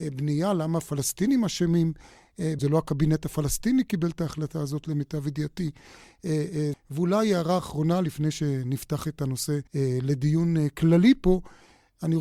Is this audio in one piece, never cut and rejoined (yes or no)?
no